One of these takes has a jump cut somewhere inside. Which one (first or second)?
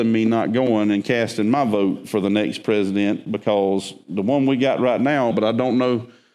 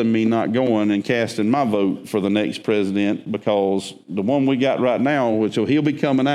first